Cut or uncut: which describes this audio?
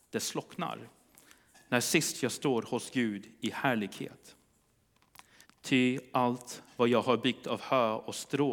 cut